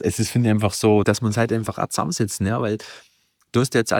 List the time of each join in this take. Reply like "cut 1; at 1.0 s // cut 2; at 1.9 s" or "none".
cut 1; at 1.0 s

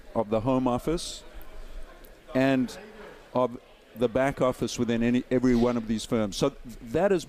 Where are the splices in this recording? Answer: none

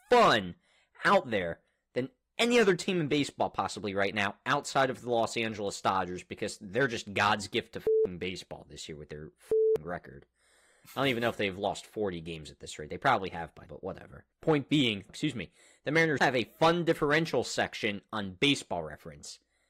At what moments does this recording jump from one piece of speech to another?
cut 1; at 13.7 s // cut 2; at 15.1 s // cut 3; at 16.2 s

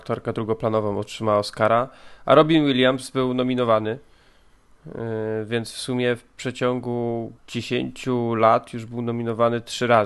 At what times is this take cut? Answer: cut 1; at 7.4 s

